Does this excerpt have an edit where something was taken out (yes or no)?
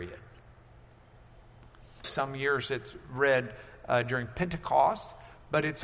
yes